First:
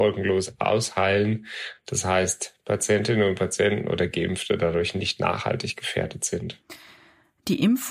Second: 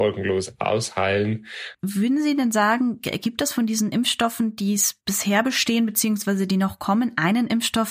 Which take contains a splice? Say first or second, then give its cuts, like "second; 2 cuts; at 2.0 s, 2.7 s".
second; 2 cuts; at 1.7 s, 5.0 s